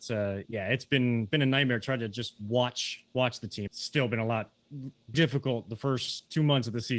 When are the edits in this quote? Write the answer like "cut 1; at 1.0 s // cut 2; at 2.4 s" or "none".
cut 1; at 3.7 s // cut 2; at 5.1 s